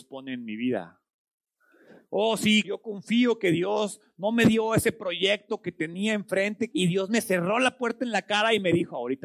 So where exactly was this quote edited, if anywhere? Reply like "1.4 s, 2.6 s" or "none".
2.6 s, 6.7 s